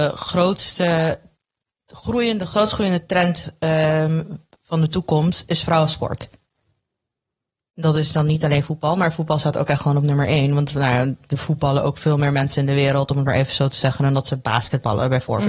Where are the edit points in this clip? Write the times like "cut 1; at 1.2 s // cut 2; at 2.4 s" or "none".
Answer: none